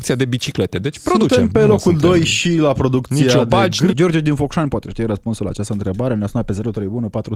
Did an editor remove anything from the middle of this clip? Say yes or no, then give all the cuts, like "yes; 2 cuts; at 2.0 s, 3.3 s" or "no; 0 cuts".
yes; 1 cut; at 3.9 s